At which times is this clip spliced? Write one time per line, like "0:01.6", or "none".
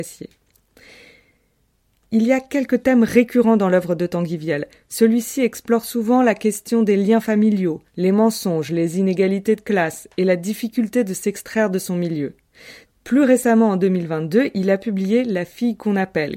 0:12.9